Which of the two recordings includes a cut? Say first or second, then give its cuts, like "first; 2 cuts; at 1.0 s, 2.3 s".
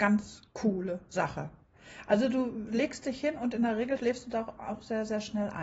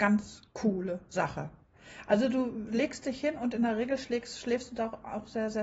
first; 1 cut; at 4.0 s